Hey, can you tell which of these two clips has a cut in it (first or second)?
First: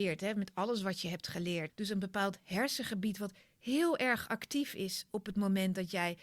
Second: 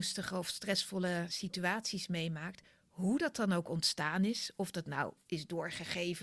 first